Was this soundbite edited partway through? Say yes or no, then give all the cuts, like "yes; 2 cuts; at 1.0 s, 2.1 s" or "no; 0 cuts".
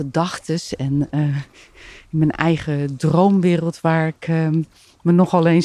no; 0 cuts